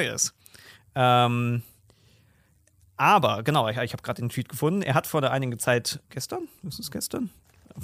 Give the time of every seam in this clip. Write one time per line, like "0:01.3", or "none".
0:06.0